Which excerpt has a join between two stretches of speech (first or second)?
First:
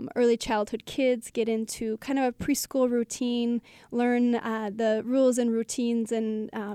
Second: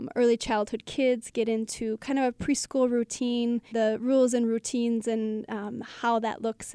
second